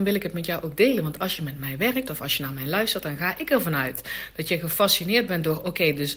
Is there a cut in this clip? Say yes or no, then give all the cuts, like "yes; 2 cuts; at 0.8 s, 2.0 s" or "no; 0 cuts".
no; 0 cuts